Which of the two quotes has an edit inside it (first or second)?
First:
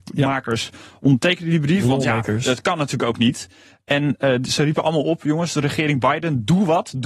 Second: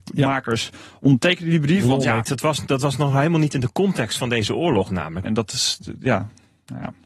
second